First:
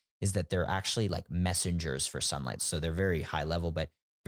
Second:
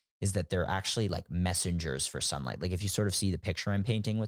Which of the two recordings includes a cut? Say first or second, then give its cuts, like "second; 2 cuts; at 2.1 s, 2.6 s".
first; 1 cut; at 2.6 s